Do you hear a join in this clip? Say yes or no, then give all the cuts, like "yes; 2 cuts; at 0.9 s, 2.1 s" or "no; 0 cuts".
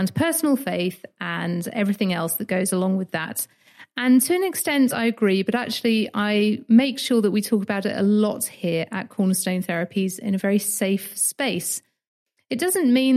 no; 0 cuts